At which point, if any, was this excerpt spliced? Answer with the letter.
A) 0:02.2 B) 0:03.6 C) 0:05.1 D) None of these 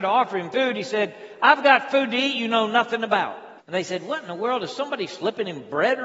B